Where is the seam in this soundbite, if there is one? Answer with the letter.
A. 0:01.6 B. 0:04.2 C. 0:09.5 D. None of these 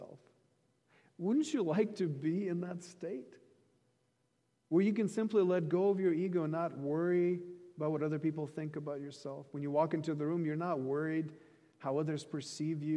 D